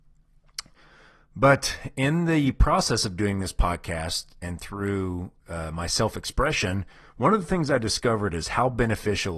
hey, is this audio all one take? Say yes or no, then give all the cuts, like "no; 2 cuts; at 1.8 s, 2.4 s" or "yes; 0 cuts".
yes; 0 cuts